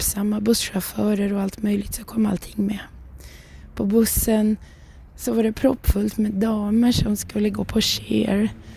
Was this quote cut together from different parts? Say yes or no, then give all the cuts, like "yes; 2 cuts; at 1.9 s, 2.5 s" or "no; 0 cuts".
no; 0 cuts